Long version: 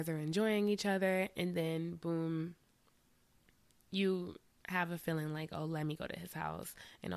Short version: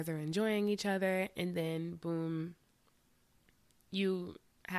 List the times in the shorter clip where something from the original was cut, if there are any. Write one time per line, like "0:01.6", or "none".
none